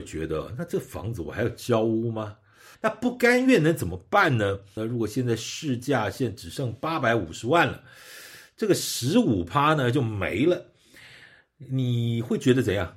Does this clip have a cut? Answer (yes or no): yes